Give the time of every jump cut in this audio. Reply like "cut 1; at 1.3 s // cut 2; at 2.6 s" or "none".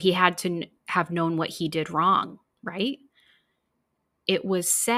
none